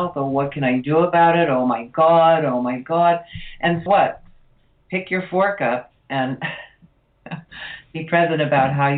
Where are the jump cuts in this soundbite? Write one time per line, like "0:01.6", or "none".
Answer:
0:03.9

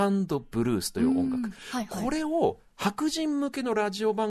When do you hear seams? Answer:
none

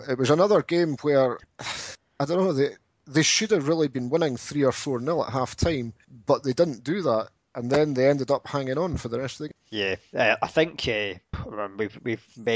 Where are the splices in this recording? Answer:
none

